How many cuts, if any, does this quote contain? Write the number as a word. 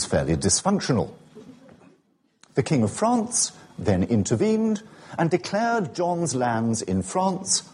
one